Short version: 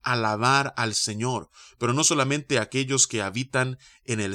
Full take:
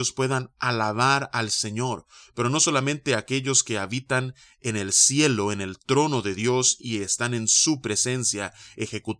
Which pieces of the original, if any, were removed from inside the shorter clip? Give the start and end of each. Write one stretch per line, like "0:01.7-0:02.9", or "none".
none